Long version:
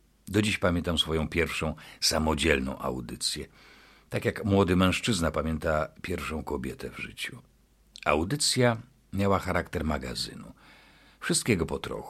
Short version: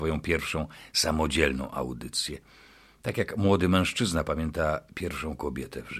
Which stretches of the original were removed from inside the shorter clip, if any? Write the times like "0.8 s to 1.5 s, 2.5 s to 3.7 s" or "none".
none